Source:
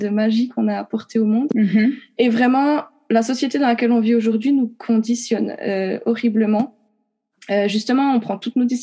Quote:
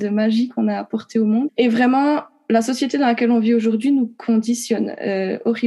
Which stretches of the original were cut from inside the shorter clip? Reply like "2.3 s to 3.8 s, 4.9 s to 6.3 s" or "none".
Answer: 1.5 s to 2.1 s